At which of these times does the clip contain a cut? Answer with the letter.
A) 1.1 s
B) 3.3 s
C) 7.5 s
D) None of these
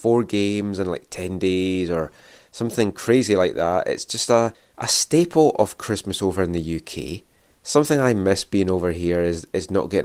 D